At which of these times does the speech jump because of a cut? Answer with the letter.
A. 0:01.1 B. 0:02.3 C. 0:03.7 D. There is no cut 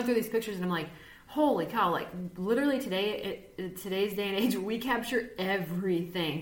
D